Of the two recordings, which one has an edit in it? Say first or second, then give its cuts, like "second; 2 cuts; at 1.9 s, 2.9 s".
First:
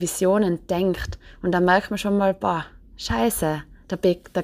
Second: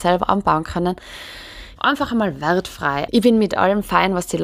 second; 2 cuts; at 1.8 s, 3.1 s